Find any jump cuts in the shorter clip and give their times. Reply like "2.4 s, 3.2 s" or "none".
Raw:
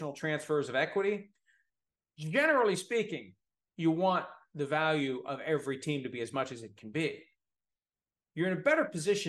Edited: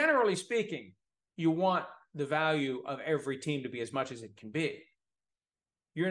none